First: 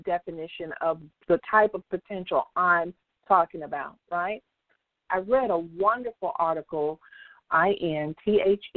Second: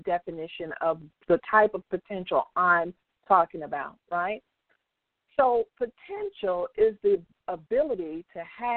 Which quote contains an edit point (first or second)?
first